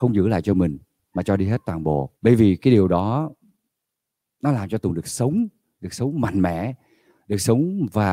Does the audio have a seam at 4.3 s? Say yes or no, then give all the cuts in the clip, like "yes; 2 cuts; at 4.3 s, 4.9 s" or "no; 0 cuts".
no; 1 cut; at 2.2 s